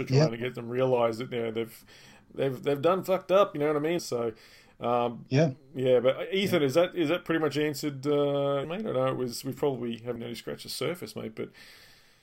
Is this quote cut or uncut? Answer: cut